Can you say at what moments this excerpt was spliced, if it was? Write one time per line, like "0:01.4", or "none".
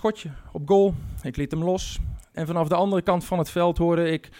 0:02.3

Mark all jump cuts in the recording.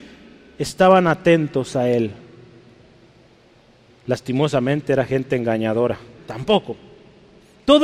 0:03.9
0:06.2

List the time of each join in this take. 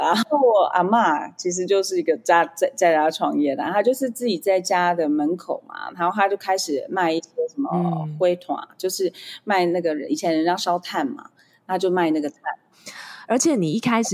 0:12.7

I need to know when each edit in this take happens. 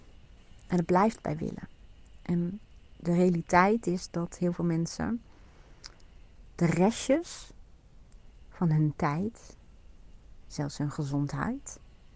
0:06.5
0:10.4

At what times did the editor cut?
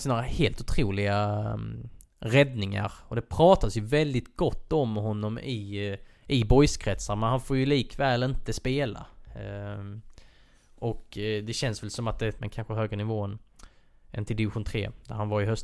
0:12.4

